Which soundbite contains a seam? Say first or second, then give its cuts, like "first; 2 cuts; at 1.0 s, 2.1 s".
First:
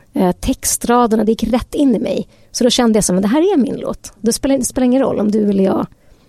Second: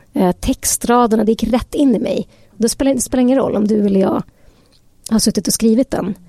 second; 1 cut; at 2.5 s